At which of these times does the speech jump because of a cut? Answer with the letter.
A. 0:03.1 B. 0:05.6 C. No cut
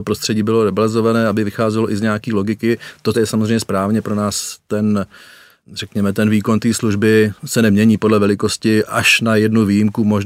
A